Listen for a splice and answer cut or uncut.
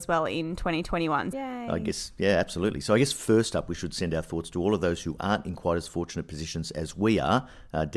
cut